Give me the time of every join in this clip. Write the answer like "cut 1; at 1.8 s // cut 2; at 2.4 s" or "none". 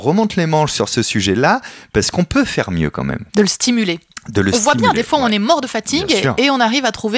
cut 1; at 3.3 s